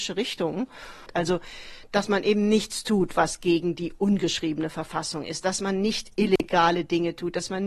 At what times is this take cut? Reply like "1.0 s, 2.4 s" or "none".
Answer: 1.1 s

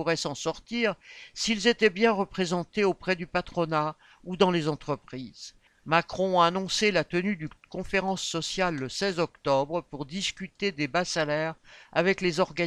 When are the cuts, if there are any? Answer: 5.7 s

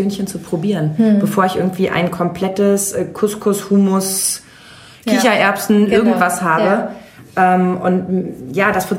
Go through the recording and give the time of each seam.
none

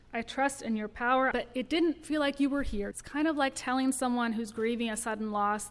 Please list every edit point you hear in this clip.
1.3 s, 2.9 s

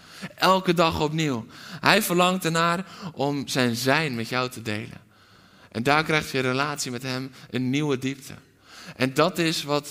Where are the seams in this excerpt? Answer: none

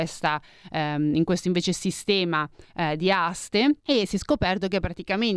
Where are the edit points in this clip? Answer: 3.8 s

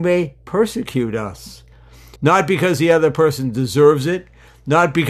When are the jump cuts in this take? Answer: 2.2 s

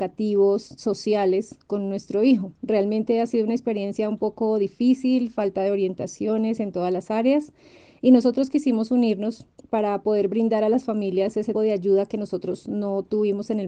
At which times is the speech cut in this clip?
11.5 s

